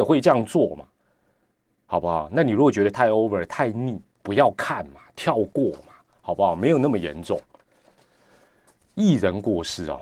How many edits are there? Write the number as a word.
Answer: zero